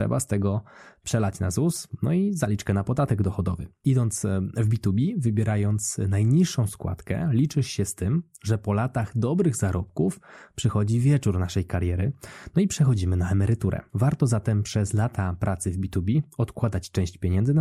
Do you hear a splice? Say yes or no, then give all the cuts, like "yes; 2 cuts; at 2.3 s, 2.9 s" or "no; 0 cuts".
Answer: yes; 2 cuts; at 3.7 s, 13.9 s